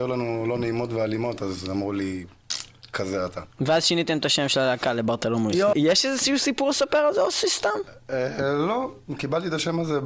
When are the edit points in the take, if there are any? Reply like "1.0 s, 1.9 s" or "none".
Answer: 5.7 s